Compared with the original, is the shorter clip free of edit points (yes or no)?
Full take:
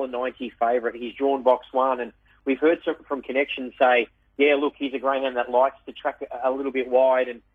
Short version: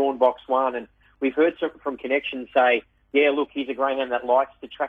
yes